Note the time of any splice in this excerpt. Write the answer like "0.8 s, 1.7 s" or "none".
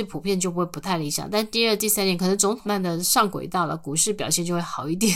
2.7 s